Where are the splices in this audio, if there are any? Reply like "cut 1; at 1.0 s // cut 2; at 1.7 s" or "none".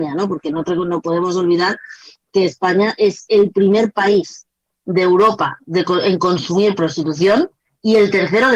none